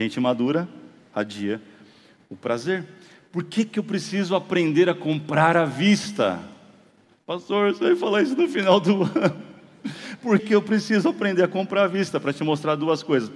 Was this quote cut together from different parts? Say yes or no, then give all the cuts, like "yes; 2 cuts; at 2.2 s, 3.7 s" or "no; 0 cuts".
yes; 1 cut; at 10.4 s